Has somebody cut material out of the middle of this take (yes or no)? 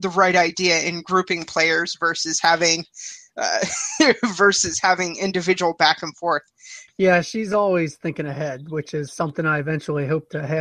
yes